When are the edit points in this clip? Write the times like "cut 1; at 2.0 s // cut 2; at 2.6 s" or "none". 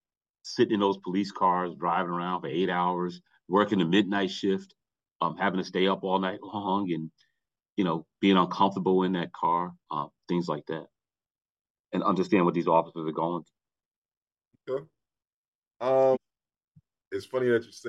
cut 1; at 16.1 s